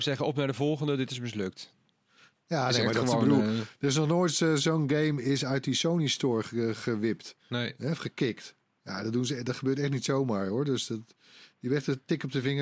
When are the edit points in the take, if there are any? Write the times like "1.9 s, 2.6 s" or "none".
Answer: 2.3 s, 7.4 s